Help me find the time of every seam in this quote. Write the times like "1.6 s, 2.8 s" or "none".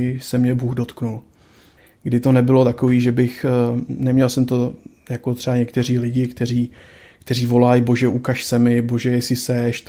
none